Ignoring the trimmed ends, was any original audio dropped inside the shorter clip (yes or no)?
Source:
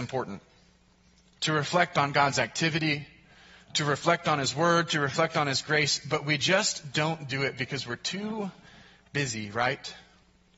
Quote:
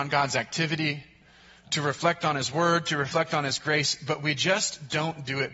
no